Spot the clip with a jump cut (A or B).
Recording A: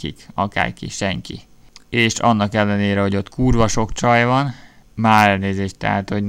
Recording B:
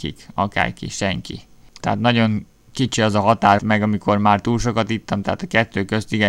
B